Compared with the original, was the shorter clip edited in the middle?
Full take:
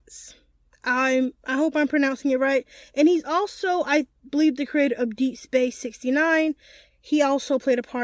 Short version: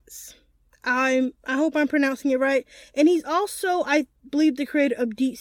no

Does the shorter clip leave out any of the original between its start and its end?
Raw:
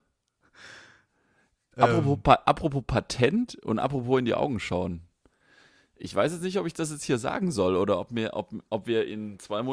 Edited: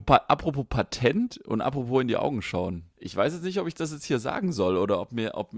yes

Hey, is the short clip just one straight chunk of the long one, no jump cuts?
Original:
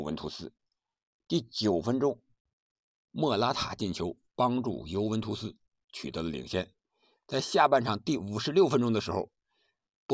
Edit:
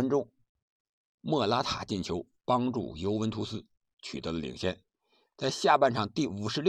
yes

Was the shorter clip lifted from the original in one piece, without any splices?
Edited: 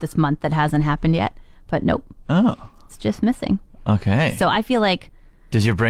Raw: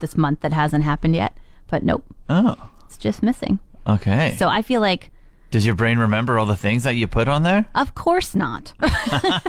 yes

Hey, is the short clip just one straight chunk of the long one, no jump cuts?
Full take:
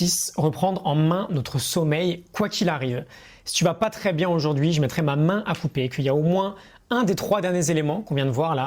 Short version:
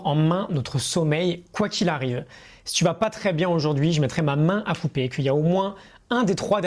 yes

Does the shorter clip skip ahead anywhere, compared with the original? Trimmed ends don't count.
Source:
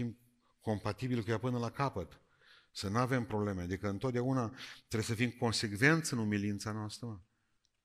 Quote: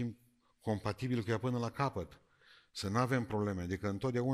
no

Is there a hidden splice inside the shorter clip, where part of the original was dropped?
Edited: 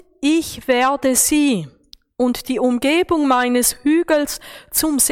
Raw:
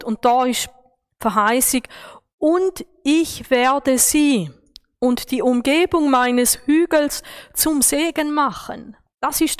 no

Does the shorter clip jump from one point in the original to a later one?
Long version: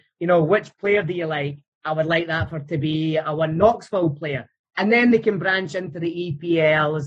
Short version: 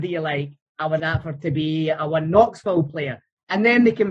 yes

